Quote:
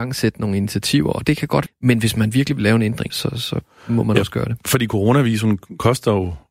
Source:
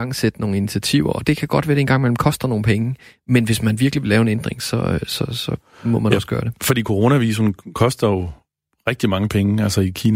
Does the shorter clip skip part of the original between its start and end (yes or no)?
yes